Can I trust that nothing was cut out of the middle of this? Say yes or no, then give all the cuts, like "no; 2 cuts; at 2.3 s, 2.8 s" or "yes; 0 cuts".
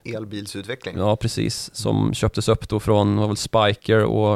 yes; 0 cuts